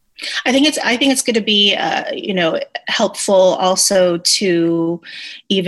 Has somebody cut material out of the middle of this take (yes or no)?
no